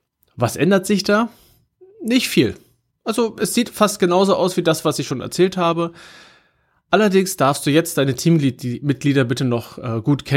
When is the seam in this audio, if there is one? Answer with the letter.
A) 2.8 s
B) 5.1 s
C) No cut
C